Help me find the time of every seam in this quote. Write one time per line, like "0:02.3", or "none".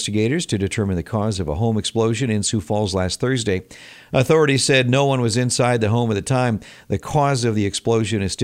none

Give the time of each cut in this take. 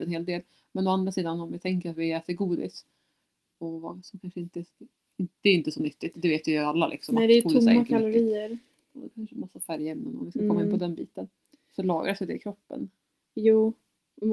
none

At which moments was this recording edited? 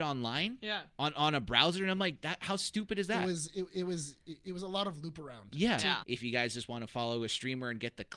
0:06.0

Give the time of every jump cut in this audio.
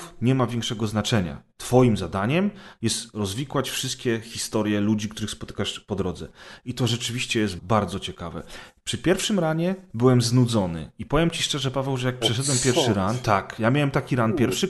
0:07.6

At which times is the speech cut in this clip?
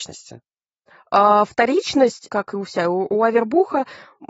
0:02.3

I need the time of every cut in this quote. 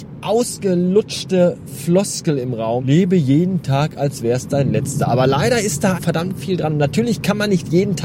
0:02.8
0:05.9

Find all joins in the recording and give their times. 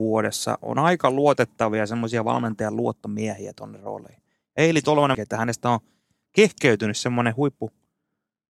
0:05.1

